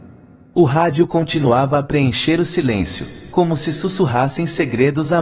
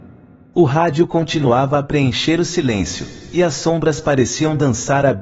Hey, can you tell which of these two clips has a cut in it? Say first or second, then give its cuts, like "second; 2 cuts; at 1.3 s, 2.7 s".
first; 1 cut; at 3.3 s